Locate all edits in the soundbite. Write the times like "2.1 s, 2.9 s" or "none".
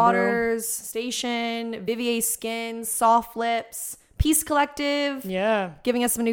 none